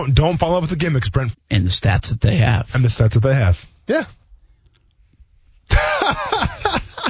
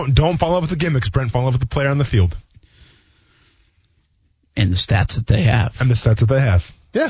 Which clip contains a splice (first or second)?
first